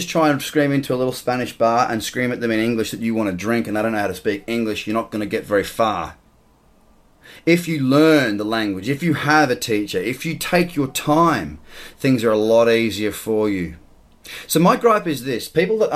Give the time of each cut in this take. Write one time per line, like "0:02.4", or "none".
none